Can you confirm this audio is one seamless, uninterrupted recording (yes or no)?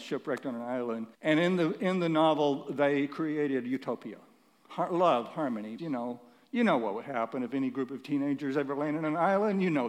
no